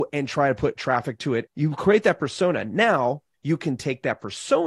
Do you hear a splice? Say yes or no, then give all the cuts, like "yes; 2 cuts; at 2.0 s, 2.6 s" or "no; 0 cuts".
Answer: yes; 1 cut; at 1.5 s